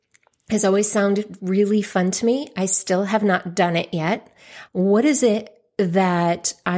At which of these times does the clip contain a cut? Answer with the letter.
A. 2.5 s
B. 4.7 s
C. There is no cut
B